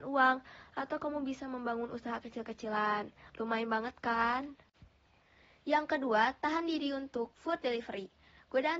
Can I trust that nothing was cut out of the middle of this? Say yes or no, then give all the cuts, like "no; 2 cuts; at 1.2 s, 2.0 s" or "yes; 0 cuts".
yes; 0 cuts